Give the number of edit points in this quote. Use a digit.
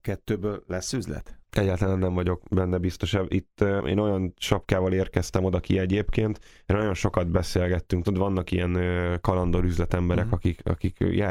0